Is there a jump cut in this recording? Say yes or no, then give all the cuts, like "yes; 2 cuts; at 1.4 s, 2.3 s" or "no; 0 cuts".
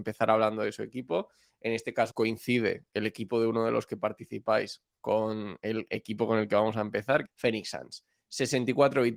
yes; 2 cuts; at 2.1 s, 7.2 s